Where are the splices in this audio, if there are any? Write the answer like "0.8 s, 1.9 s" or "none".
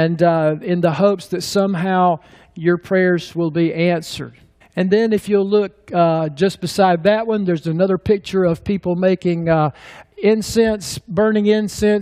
4.6 s